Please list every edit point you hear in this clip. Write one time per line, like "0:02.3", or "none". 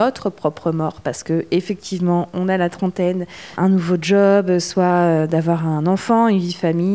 0:03.6